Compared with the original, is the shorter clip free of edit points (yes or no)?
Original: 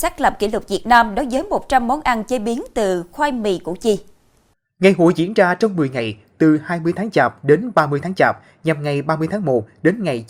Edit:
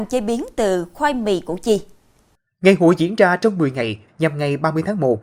no